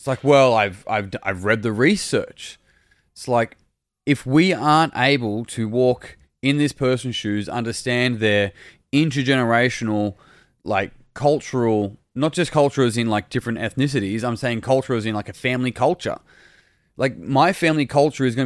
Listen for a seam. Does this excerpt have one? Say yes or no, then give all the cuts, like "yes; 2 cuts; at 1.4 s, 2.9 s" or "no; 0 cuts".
no; 0 cuts